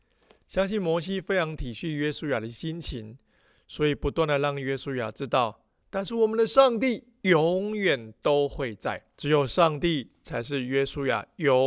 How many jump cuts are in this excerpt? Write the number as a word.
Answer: two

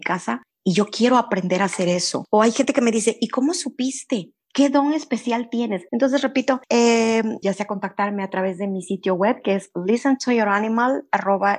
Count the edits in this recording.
two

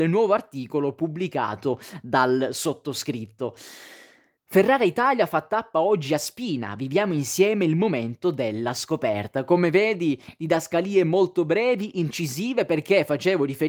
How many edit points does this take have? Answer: one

